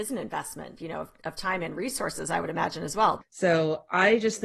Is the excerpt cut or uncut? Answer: cut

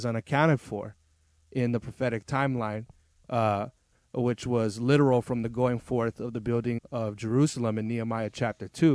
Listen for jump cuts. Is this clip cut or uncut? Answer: cut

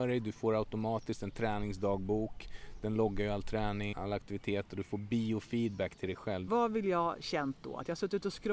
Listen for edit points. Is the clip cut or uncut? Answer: cut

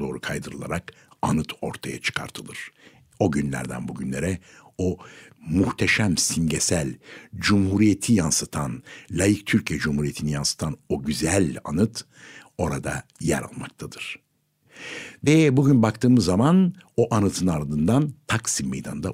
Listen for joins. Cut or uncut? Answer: uncut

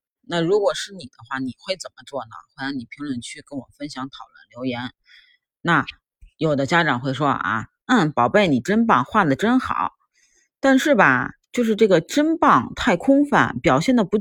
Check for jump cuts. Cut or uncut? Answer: uncut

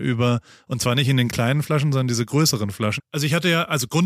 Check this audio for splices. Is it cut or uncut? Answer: cut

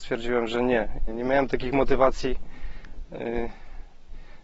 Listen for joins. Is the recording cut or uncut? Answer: cut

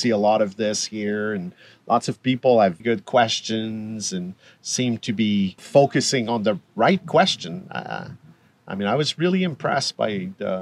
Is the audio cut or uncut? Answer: cut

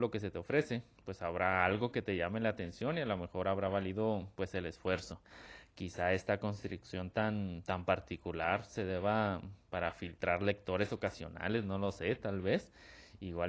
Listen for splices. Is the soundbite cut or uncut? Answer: uncut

